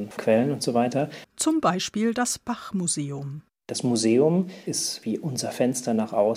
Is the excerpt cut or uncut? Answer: cut